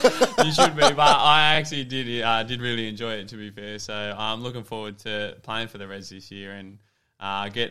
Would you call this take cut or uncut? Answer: uncut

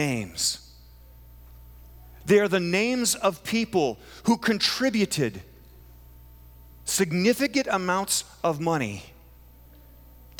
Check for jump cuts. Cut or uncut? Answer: uncut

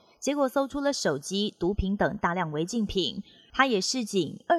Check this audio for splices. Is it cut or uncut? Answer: cut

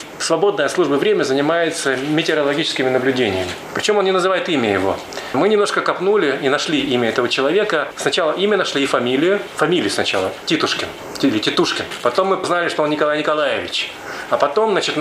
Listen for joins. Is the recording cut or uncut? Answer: cut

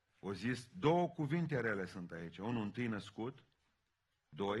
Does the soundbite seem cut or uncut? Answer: uncut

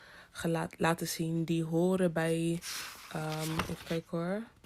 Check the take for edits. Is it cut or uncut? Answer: uncut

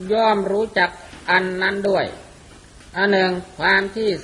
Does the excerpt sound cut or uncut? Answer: uncut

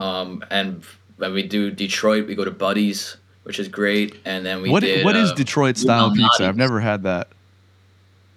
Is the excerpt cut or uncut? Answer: uncut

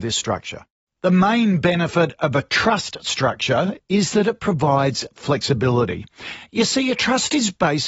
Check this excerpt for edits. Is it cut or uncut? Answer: cut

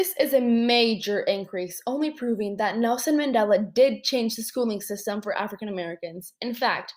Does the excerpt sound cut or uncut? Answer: uncut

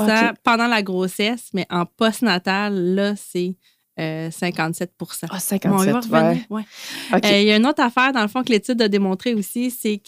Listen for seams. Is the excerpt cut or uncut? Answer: uncut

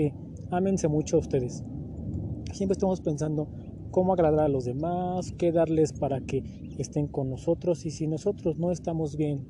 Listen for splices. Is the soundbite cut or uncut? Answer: cut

